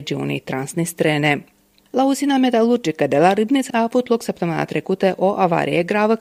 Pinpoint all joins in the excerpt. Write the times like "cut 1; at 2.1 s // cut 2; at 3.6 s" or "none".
cut 1; at 3.7 s